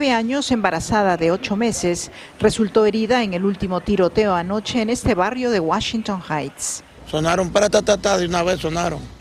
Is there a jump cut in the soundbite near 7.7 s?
yes; 1 cut; at 7.7 s

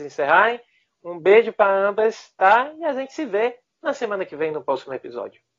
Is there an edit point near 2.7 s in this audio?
no; 0 cuts

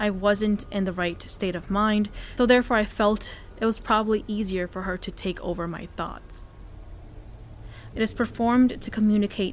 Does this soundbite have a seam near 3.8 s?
no; 2 cuts; at 2.4 s, 7.9 s

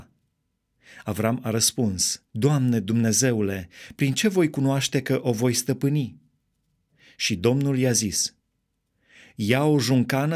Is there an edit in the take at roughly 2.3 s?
yes; 1 cut; at 2.3 s

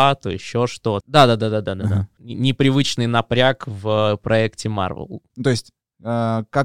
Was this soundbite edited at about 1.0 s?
yes; 3 cuts; at 1.0 s, 2.2 s, 5.3 s

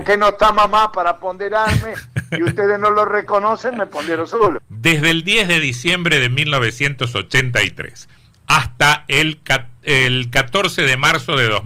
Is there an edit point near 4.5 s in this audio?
yes; 1 cut; at 4.5 s

